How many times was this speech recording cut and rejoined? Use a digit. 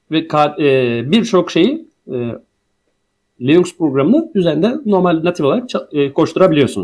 0